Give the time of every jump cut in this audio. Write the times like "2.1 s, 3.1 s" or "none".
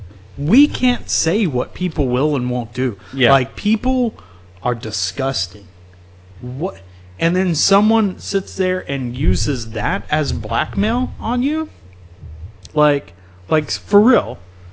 6.3 s, 12.7 s